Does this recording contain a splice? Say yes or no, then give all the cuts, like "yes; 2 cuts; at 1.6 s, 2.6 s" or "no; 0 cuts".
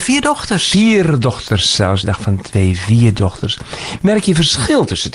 no; 0 cuts